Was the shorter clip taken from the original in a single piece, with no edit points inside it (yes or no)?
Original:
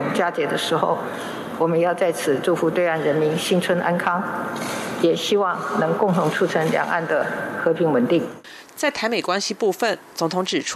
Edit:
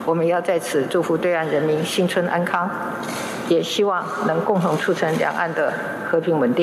yes